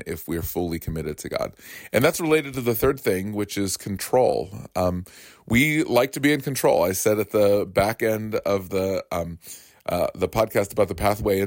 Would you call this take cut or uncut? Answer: uncut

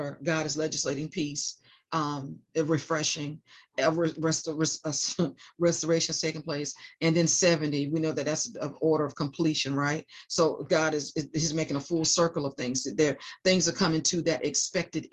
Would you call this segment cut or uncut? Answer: uncut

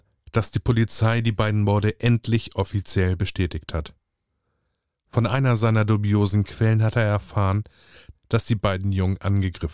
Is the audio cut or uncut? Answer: cut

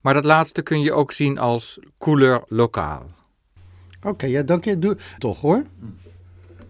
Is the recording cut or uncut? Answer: cut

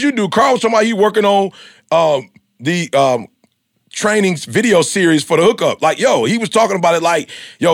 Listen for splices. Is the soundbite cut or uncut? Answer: uncut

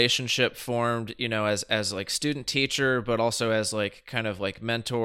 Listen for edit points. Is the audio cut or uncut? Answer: uncut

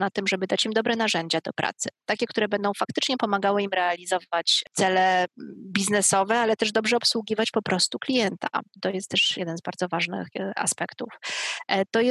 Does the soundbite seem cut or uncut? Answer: cut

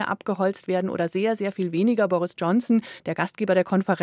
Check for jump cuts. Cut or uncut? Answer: uncut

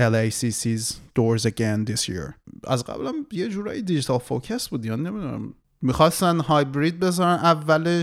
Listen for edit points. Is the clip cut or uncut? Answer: uncut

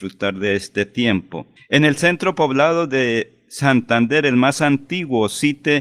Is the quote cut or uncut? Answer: uncut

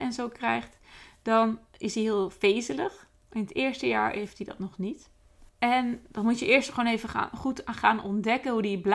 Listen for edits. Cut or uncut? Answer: cut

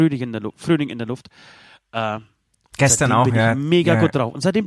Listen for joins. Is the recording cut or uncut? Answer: uncut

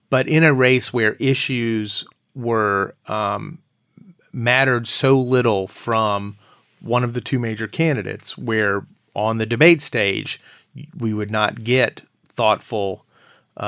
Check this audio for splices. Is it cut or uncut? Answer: uncut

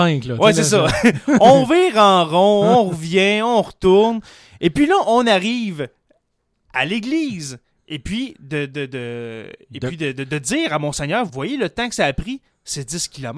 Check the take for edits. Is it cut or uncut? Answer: cut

